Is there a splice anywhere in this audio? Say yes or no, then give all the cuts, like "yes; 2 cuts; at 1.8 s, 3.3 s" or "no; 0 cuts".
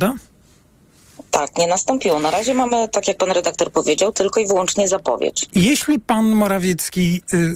no; 0 cuts